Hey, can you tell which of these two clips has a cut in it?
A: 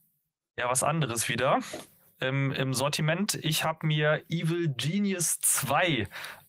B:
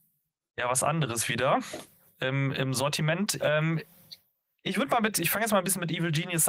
B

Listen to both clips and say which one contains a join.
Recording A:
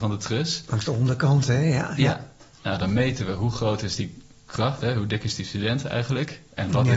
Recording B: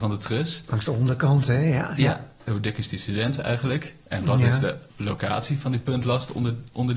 B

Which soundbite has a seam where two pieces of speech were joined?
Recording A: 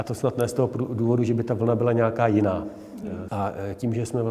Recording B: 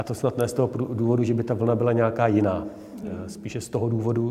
A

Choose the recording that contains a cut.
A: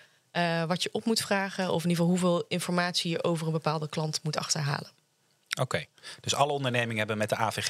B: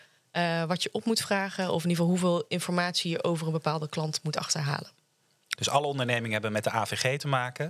B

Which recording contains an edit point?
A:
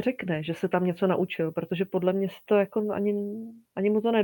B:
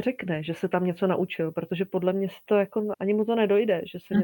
B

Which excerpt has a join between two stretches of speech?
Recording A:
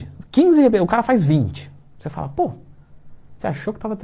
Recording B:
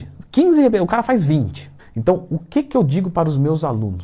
B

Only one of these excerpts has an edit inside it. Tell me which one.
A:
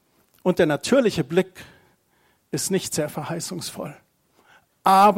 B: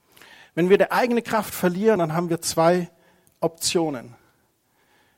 B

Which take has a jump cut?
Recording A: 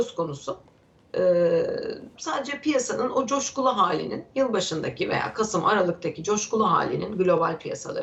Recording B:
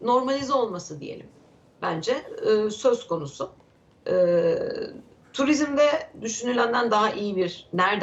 A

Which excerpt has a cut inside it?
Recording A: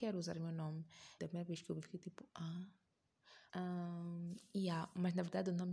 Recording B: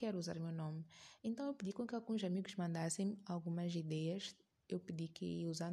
A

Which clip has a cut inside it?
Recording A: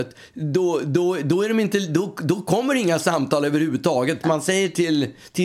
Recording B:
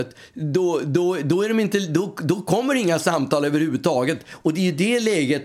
A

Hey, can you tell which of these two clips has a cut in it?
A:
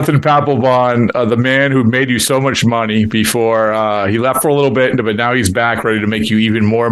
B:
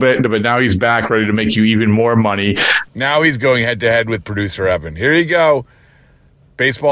B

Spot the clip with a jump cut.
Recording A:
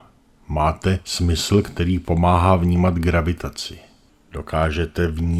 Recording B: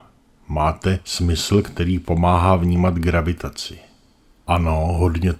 A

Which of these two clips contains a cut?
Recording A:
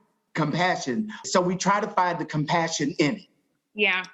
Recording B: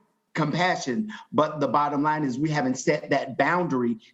A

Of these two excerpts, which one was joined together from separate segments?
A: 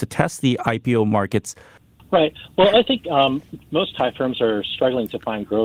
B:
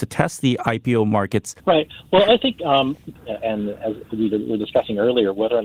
B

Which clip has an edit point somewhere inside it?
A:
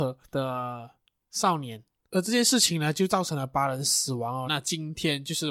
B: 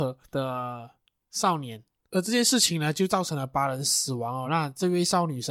A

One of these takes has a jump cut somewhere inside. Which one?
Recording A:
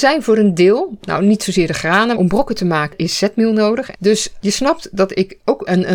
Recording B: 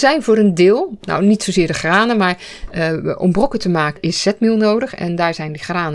A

